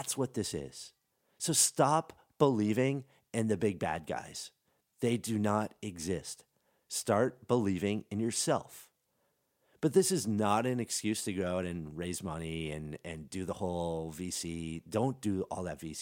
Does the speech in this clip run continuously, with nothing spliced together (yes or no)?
yes